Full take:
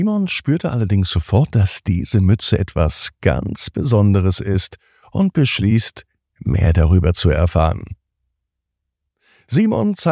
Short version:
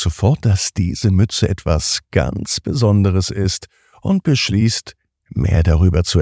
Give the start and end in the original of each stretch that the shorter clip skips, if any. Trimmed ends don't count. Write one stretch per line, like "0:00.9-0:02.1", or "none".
none